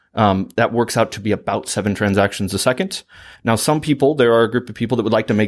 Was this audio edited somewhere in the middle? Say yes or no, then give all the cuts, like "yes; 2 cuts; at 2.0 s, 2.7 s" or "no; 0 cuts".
yes; 1 cut; at 3.4 s